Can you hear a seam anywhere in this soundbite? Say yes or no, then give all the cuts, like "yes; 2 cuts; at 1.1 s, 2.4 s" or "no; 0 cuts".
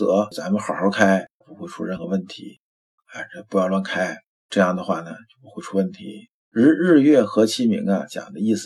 yes; 3 cuts; at 1.4 s, 3.0 s, 6.4 s